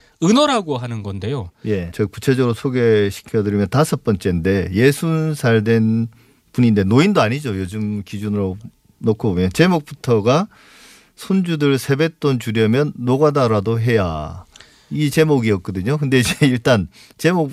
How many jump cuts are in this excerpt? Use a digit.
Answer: 1